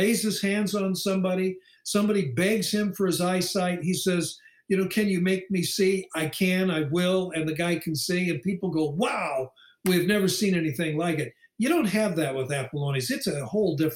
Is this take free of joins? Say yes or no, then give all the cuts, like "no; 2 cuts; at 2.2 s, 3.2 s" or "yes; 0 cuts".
yes; 0 cuts